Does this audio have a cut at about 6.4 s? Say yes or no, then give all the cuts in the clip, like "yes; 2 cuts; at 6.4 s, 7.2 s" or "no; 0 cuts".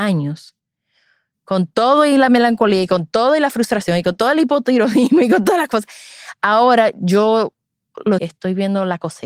no; 1 cut; at 8.2 s